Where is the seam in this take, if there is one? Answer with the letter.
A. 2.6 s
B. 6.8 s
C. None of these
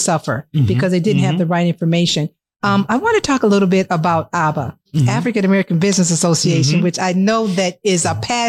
C